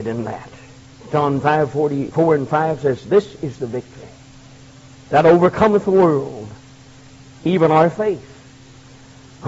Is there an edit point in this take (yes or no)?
yes